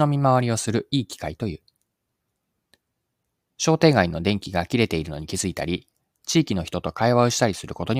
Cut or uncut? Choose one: uncut